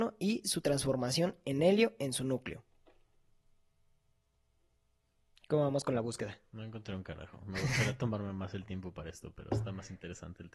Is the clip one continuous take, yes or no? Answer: yes